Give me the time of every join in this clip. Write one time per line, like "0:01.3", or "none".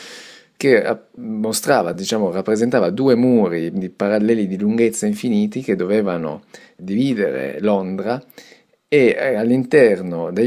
none